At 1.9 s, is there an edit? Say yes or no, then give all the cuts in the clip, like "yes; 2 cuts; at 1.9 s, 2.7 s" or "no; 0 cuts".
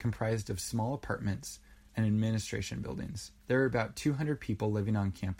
yes; 2 cuts; at 1.9 s, 3.4 s